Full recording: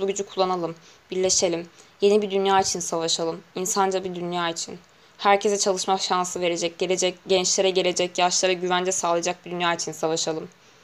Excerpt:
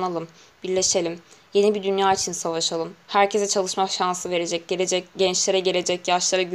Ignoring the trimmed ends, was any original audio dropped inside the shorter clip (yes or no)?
yes